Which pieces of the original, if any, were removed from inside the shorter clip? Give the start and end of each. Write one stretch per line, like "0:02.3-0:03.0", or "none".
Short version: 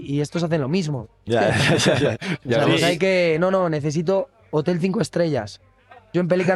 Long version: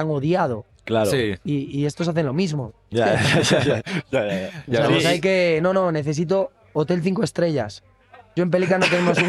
0:04.1-0:04.6

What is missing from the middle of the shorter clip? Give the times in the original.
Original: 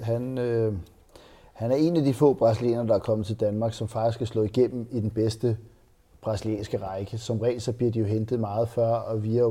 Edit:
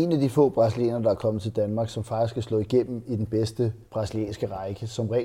0:05.7-0:06.2

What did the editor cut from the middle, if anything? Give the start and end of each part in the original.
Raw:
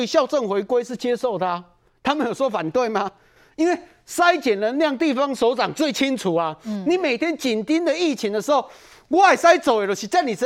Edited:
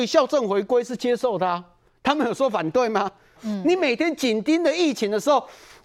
0:03.4-0:06.6

